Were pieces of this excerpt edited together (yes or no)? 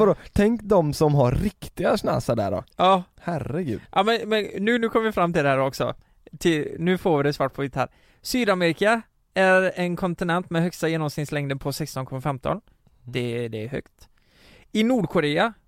no